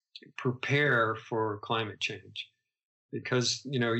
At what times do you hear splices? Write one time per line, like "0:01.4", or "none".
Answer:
none